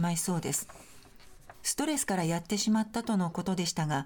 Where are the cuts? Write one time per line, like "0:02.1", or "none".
0:01.5